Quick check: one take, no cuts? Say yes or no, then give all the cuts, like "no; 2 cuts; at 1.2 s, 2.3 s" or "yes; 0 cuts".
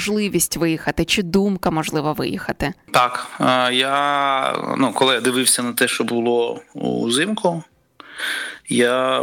yes; 0 cuts